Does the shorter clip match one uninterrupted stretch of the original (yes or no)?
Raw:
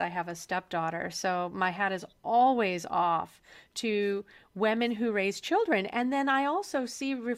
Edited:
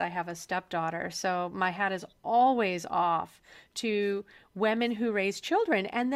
yes